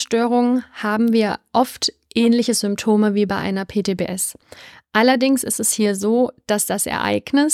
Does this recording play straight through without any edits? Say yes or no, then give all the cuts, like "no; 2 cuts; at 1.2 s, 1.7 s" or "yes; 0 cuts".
yes; 0 cuts